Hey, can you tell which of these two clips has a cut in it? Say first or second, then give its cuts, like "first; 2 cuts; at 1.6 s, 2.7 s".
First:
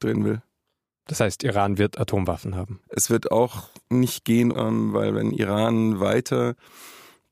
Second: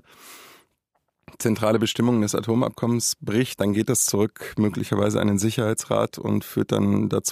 first; 2 cuts; at 2.8 s, 4.5 s